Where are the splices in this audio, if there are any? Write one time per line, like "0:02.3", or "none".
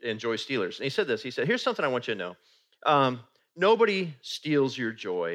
none